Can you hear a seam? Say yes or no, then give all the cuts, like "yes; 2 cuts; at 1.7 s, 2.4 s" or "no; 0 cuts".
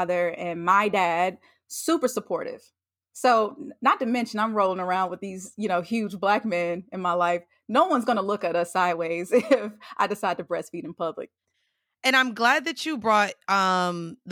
no; 0 cuts